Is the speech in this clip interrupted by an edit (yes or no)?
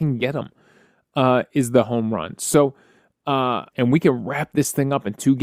yes